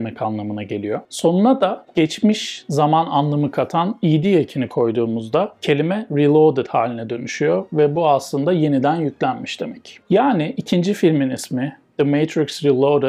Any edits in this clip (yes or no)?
no